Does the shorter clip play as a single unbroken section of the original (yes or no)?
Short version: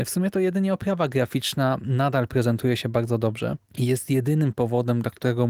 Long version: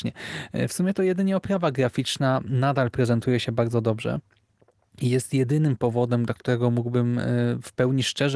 no